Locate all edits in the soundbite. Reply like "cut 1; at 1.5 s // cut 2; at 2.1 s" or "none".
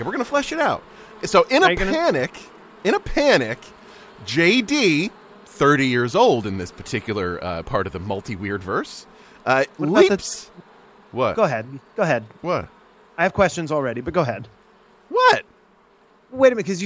none